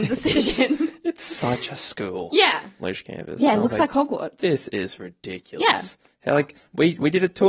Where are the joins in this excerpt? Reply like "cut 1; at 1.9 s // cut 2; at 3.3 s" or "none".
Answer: cut 1; at 2.8 s